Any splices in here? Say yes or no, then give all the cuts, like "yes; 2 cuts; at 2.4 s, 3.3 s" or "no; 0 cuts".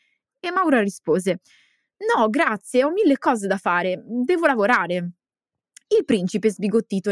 no; 0 cuts